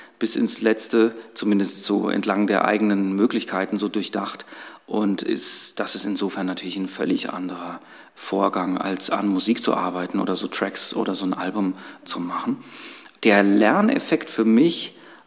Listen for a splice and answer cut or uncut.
uncut